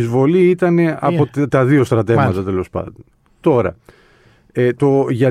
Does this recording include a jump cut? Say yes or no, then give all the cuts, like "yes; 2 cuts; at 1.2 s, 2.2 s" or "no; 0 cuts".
no; 0 cuts